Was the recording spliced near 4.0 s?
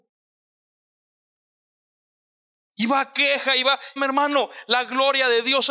yes; 1 cut; at 4.0 s

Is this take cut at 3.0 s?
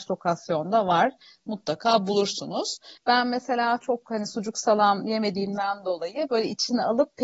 yes; 1 cut; at 3.0 s

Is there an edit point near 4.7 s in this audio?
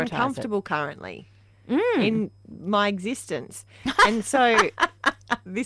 no; 0 cuts

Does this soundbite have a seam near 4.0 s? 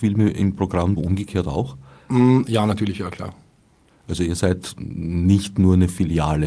no; 1 cut; at 1.0 s

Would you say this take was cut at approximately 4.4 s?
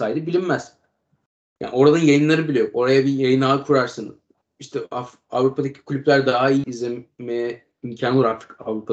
no; 1 cut; at 6.6 s

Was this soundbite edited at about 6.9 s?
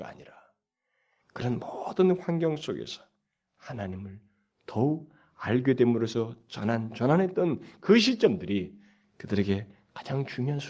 yes; 1 cut; at 6.9 s

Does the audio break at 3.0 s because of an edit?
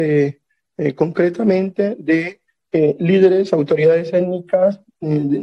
no; 0 cuts

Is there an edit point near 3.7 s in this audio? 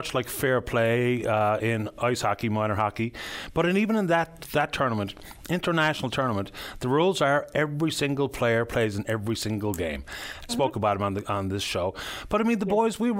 no; 1 cut; at 10.5 s

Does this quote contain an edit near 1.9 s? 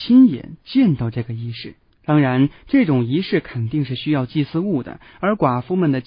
yes; 1 cut; at 1.9 s

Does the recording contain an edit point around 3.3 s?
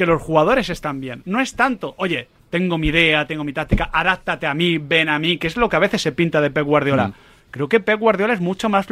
no; 0 cuts

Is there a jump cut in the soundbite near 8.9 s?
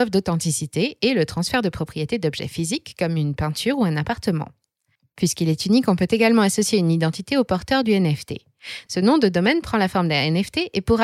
yes; 1 cut; at 8.9 s

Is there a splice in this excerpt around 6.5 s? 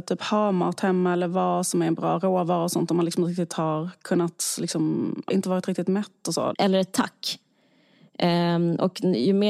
yes; 2 cuts; at 5.3 s, 6.5 s

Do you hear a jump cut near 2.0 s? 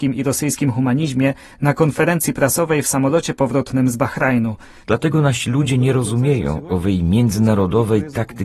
no; 1 cut; at 4.8 s

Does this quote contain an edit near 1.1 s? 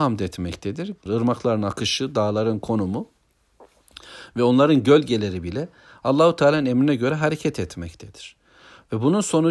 yes; 1 cut; at 1.1 s

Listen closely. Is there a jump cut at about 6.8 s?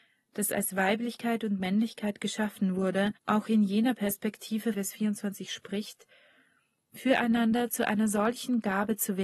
no; 2 cuts; at 3.2 s, 4.7 s

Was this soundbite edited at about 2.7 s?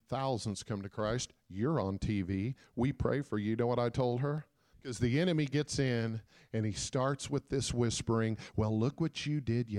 no; 1 cut; at 4.7 s

